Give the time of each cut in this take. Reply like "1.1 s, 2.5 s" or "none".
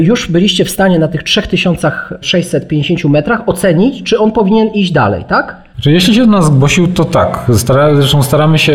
none